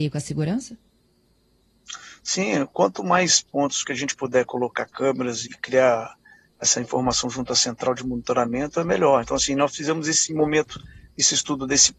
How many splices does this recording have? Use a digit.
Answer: 1